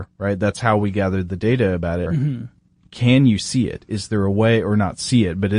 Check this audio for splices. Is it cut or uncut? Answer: cut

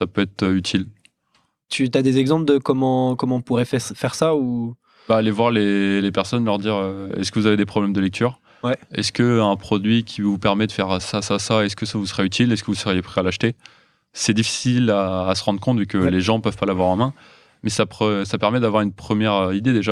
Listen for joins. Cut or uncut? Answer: uncut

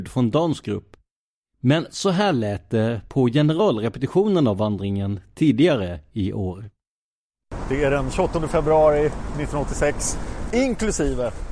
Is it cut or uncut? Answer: cut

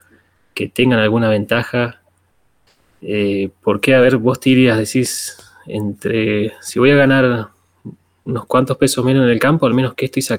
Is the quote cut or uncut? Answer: uncut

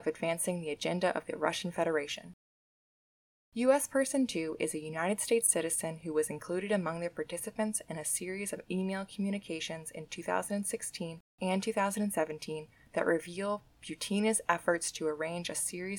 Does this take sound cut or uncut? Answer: uncut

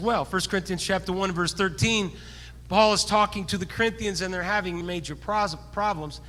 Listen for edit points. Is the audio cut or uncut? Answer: cut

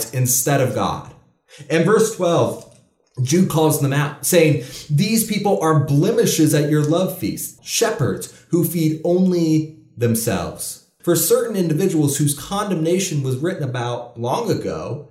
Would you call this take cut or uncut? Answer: cut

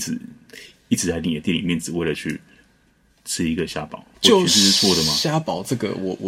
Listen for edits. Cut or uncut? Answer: cut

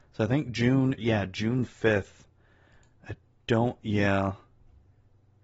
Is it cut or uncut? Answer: cut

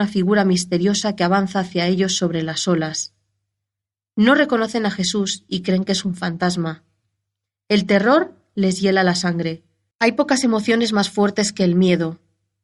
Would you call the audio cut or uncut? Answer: cut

